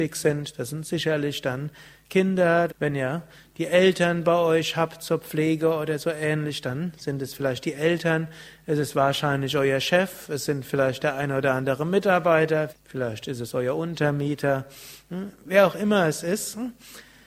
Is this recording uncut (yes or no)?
no